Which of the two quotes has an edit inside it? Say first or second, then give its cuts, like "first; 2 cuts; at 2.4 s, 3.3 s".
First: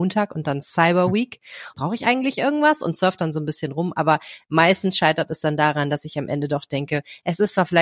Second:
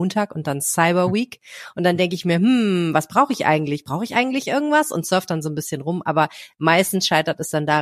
first; 1 cut; at 1.7 s